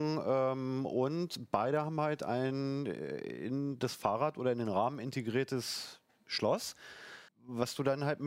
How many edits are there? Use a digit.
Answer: 1